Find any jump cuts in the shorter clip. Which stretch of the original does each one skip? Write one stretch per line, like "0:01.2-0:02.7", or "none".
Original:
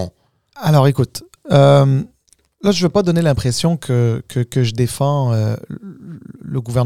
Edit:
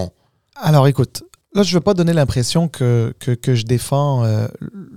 0:01.4-0:02.5